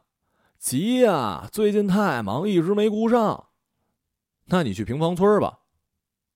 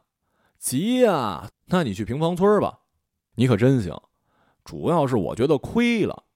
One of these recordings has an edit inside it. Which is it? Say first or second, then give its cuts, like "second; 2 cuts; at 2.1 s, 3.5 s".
second; 2 cuts; at 1.5 s, 3.3 s